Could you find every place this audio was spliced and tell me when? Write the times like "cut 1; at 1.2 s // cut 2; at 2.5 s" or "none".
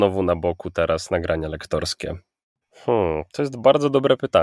cut 1; at 2.6 s